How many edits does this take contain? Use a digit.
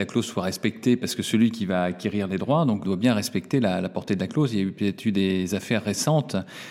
1